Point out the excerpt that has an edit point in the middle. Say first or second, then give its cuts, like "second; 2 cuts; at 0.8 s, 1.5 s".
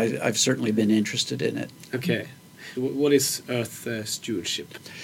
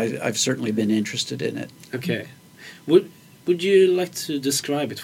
first; 1 cut; at 2.7 s